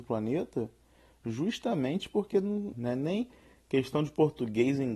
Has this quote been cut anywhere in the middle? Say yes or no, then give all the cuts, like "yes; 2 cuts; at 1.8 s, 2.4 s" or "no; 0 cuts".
yes; 1 cut; at 2.7 s